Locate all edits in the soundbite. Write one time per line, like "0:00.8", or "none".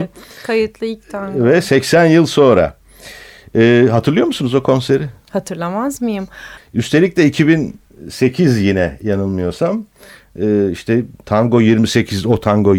0:06.6